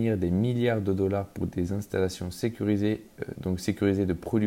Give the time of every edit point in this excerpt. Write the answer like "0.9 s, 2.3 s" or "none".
3.3 s

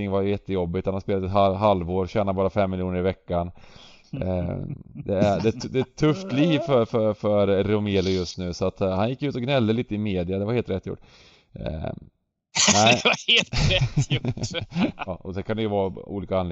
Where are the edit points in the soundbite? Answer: 15.1 s

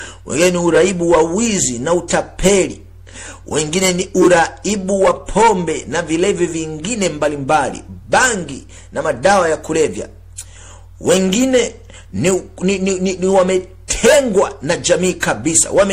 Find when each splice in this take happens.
none

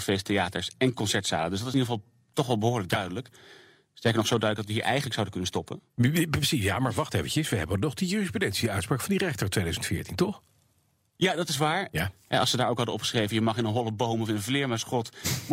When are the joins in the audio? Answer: 11.9 s

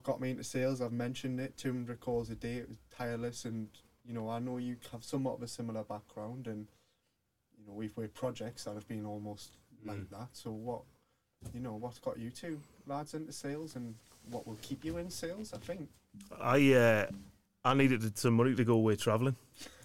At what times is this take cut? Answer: 3.4 s

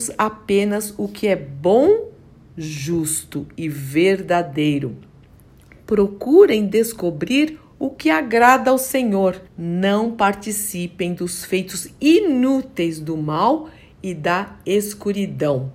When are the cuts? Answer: 9.5 s

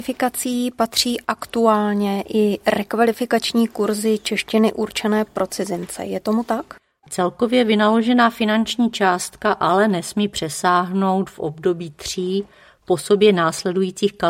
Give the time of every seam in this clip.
7.0 s

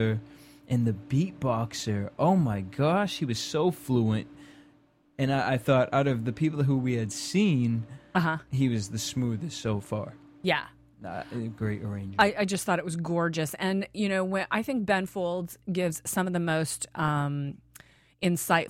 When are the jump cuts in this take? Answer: none

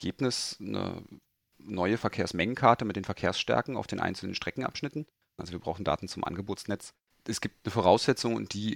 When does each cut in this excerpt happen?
5.4 s, 7.1 s

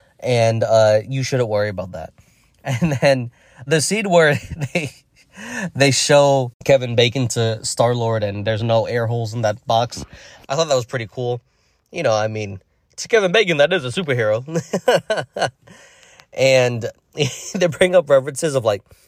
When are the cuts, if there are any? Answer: 3.7 s, 10.4 s

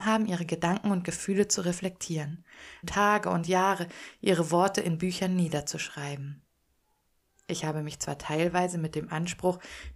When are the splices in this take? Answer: 2.8 s

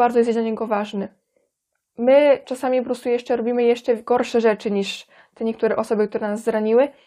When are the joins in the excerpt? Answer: 1.9 s

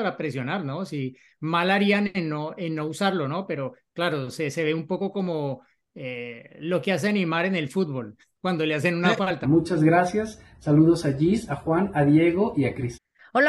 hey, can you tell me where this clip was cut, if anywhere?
9.4 s

